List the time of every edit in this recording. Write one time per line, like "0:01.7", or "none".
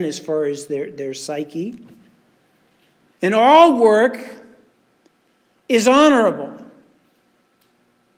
0:03.1